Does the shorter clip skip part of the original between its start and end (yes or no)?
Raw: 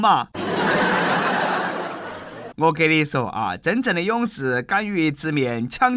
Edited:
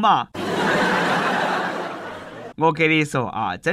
no